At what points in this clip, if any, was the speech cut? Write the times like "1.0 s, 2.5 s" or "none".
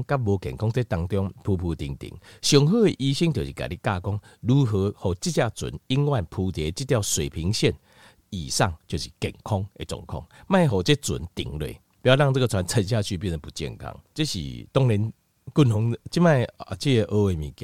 14.1 s